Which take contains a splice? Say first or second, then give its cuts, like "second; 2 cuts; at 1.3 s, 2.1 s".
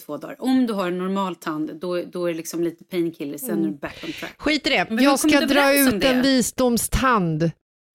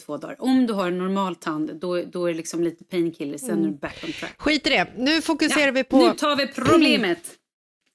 first; 1 cut; at 4.9 s